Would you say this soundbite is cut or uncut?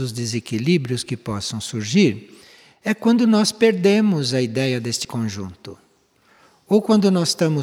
uncut